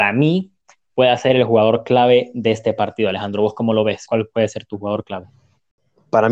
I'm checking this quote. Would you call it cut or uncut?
uncut